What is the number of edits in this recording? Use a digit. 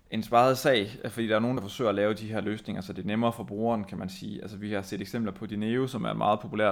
0